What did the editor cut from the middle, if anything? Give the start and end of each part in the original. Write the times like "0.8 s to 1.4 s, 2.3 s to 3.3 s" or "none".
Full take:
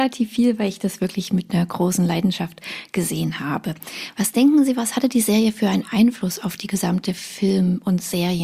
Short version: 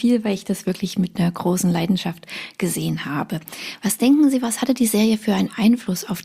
none